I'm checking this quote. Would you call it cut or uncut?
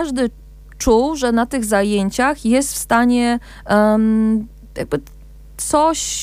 uncut